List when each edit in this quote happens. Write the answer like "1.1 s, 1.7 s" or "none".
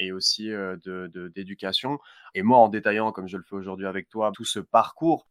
2.3 s, 4.3 s